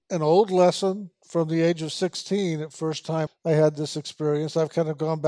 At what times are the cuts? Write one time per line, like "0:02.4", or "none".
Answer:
0:03.3